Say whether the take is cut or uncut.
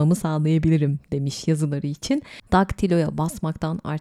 cut